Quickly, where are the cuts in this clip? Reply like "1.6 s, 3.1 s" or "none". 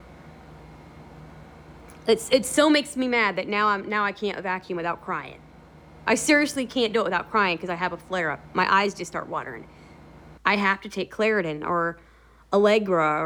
10.4 s